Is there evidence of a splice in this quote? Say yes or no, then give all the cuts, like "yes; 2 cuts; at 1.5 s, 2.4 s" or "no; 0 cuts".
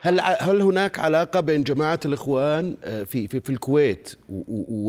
no; 0 cuts